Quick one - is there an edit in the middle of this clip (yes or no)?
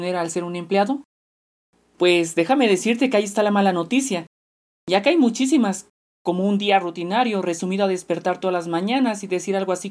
no